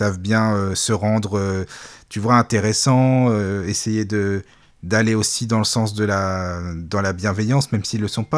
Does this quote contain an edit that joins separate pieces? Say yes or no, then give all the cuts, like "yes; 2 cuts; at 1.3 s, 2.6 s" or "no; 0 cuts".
no; 0 cuts